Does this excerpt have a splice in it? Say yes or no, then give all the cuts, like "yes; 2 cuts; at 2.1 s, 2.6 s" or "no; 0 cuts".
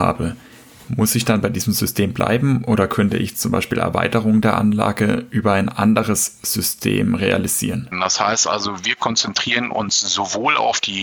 yes; 1 cut; at 7.9 s